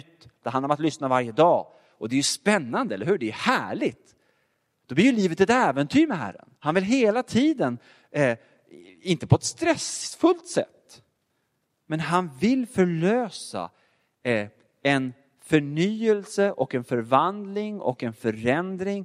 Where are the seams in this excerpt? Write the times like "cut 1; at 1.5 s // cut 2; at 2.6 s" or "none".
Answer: cut 1; at 6.6 s